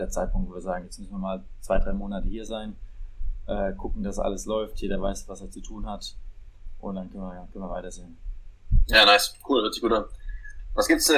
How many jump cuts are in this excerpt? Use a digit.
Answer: 0